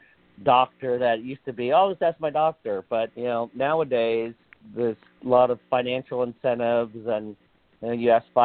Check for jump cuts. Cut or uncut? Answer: cut